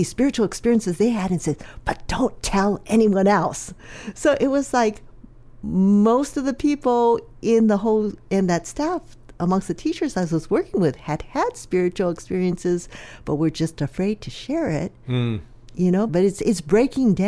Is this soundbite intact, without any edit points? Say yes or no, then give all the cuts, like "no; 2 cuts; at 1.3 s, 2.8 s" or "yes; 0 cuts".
no; 1 cut; at 16.1 s